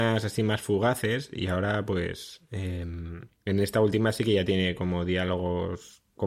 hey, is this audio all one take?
yes; 0 cuts

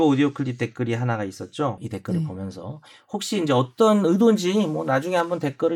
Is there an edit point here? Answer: yes; 1 cut; at 1.8 s

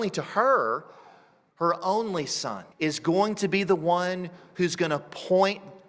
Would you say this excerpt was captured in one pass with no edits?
no; 2 cuts; at 1.5 s, 2.7 s

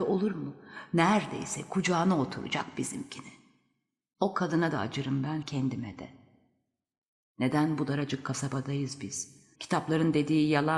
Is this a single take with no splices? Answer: no; 2 cuts; at 5.4 s, 9.5 s

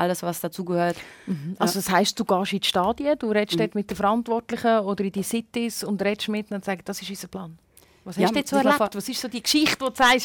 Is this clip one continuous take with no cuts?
yes; 0 cuts

